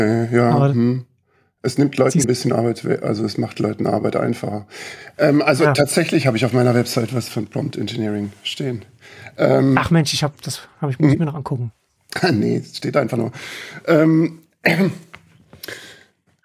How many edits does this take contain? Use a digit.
1